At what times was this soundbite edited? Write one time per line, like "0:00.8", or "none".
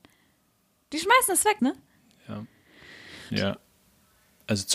0:01.6
0:03.3